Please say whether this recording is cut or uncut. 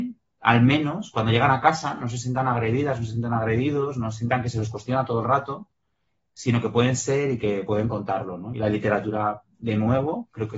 uncut